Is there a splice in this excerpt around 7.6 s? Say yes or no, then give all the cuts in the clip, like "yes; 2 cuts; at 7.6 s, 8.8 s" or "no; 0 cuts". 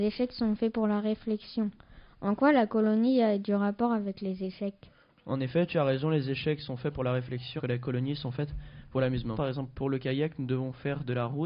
yes; 2 cuts; at 7.6 s, 9.3 s